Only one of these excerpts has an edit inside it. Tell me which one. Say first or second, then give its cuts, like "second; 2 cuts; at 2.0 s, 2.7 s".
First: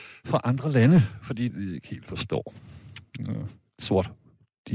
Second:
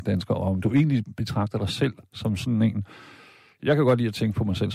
first; 1 cut; at 1.5 s